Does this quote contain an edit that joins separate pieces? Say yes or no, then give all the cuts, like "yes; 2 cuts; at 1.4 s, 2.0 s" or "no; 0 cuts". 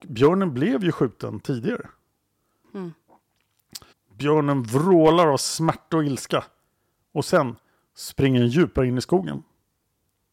yes; 2 cuts; at 2.6 s, 3.9 s